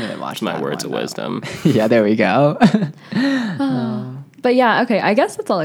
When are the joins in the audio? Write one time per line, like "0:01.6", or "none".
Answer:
none